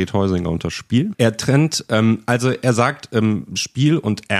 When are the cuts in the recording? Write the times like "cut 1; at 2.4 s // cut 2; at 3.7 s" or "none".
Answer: cut 1; at 1.1 s